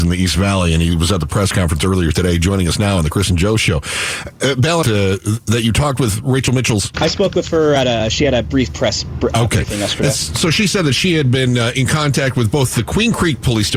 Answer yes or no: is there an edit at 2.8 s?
no